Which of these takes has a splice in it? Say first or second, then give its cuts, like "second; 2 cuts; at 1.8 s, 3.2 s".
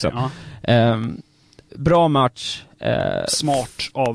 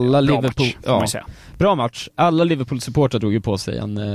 first; 1 cut; at 1.7 s